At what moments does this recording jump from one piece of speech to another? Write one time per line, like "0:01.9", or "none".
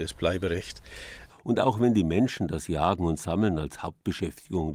0:01.3